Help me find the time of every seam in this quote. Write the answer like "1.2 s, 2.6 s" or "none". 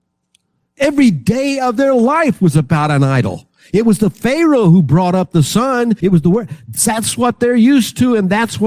6.0 s